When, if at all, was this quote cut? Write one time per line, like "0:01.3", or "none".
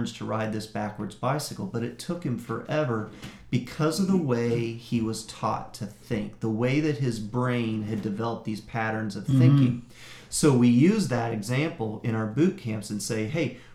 none